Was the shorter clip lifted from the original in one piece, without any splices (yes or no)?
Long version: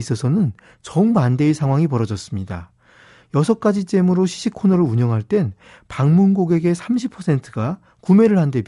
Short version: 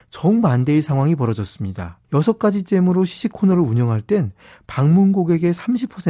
no